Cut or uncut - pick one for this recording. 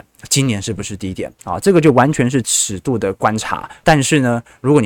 cut